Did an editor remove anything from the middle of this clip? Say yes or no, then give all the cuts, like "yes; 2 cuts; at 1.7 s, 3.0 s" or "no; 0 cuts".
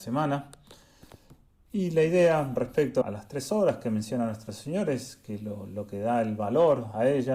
yes; 1 cut; at 3.0 s